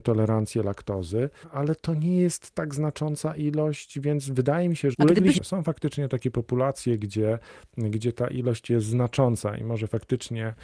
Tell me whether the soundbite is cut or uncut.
cut